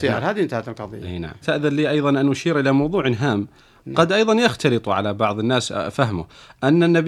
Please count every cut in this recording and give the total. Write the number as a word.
one